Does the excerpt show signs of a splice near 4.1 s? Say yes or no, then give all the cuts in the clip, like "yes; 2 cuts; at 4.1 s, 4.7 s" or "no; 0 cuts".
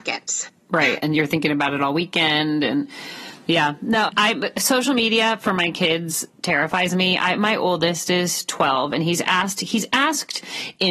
yes; 1 cut; at 4.1 s